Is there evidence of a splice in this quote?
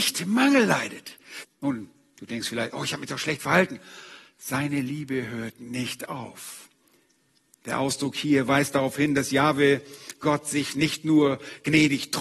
yes; 1 cut; at 1.4 s

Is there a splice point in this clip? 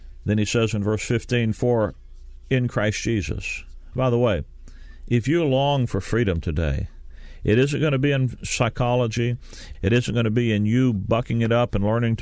yes; 1 cut; at 9.7 s

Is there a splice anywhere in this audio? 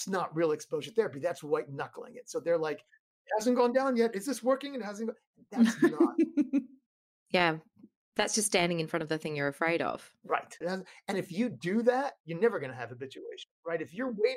yes; 1 cut; at 10.6 s

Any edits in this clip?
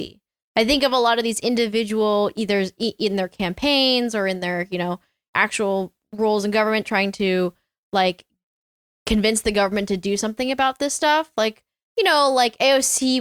no; 0 cuts

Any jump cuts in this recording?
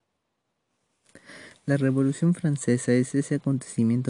no; 0 cuts

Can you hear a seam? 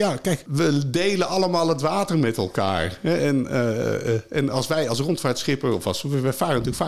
no; 0 cuts

